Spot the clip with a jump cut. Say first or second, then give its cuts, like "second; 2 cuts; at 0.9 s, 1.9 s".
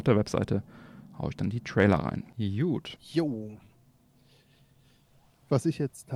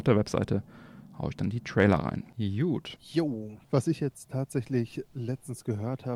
second; 1 cut; at 3.6 s